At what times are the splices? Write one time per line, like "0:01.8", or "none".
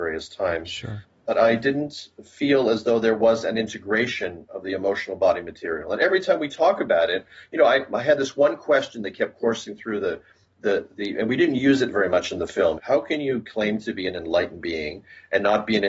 0:12.8

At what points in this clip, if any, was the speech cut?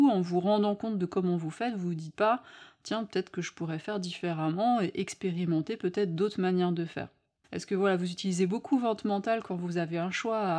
0:07.4

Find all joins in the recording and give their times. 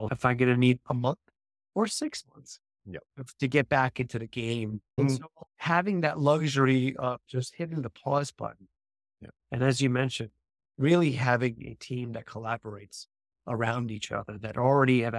0:05.5
0:09.4

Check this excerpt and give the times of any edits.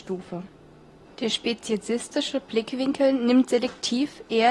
0:01.0

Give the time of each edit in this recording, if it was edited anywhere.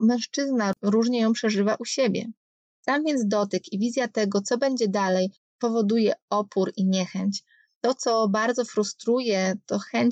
none

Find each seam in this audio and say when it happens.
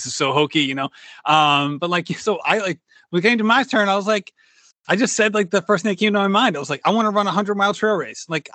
none

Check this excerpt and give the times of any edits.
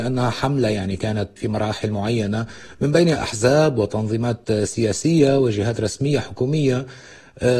0:01.4

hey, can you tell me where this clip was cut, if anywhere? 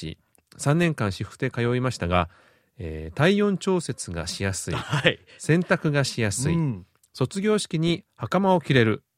none

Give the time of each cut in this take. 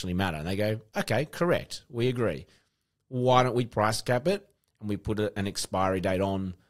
none

